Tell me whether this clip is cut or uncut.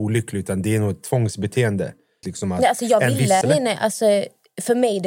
cut